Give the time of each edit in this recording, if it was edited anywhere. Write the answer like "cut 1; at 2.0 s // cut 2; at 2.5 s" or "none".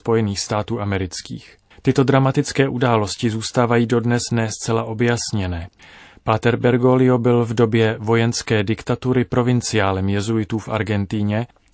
cut 1; at 1.7 s